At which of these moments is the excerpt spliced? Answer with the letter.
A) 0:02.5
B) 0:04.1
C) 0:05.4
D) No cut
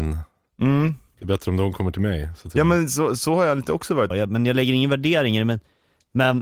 B